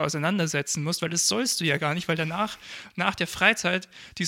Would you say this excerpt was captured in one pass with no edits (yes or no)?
yes